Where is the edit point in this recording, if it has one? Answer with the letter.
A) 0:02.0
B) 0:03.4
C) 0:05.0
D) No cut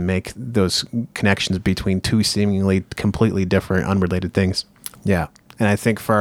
C